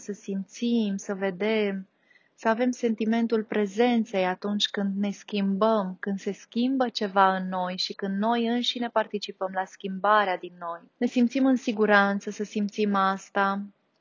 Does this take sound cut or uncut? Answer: cut